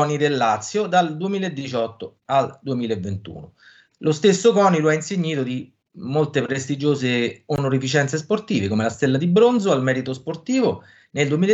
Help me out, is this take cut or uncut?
uncut